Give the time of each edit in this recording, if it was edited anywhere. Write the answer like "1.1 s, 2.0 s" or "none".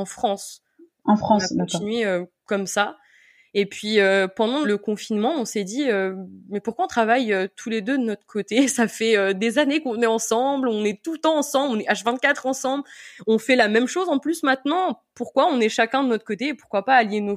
4.6 s